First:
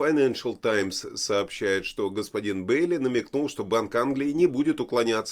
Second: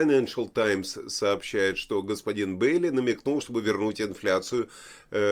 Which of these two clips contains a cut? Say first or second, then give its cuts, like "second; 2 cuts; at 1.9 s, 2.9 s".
second; 1 cut; at 3.4 s